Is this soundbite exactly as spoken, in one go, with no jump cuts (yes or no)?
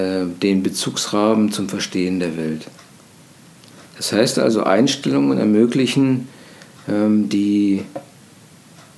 yes